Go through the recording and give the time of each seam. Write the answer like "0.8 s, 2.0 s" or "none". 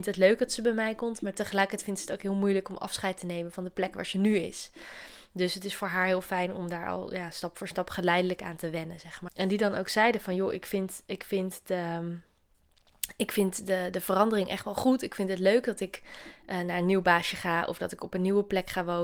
9.3 s